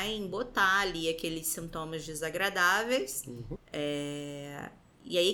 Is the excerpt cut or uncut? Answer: cut